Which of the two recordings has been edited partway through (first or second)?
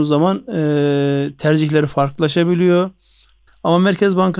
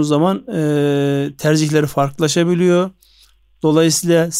first